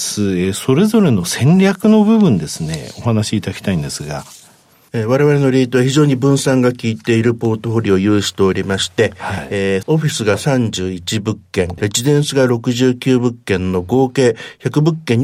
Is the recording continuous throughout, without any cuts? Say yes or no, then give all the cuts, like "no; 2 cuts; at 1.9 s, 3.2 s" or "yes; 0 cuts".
no; 2 cuts; at 9.8 s, 11.8 s